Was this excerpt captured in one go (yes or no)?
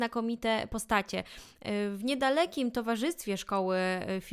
yes